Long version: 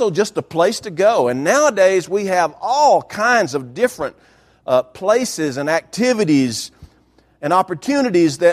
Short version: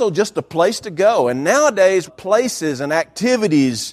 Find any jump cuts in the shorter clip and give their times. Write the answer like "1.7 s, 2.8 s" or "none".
2.1 s

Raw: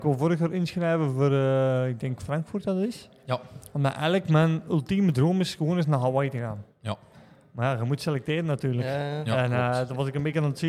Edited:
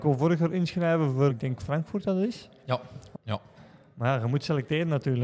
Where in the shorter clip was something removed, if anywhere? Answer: 1.3 s, 3.1 s

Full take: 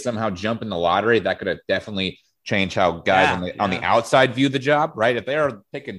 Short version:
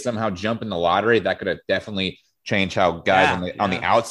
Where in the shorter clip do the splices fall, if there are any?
none

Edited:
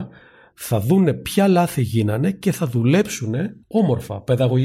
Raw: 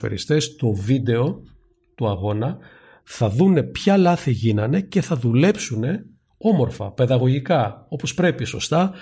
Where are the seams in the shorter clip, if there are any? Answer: 3.6 s

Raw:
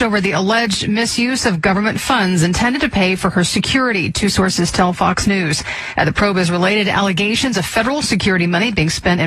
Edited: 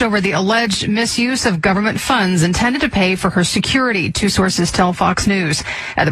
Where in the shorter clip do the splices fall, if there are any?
none

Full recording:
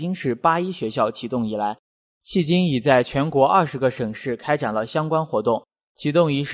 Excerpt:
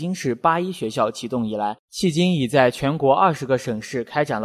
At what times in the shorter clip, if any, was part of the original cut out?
1.8 s

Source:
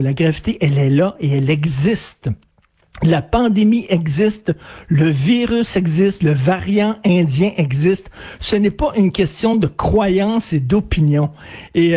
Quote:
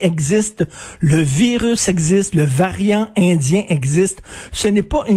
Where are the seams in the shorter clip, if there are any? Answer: none

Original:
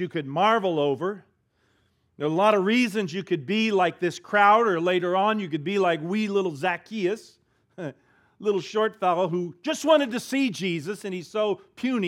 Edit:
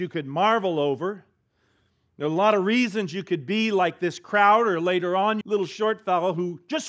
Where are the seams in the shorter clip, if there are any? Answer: 5.4 s

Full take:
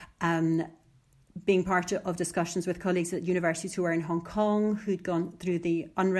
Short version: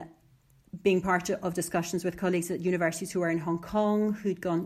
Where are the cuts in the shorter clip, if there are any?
none

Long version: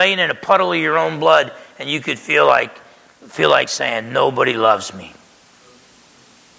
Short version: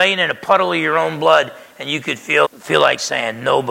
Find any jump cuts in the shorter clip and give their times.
2.4 s

